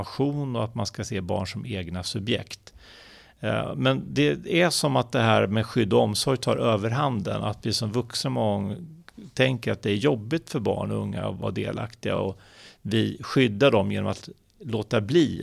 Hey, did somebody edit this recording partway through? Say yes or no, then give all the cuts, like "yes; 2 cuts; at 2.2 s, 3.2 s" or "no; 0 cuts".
no; 0 cuts